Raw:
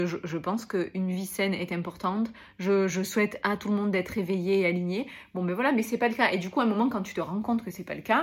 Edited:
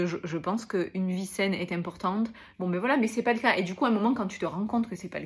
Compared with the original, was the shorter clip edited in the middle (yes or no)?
yes